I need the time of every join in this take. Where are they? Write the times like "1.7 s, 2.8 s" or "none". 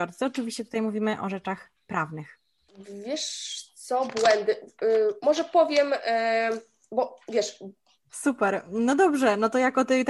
8.1 s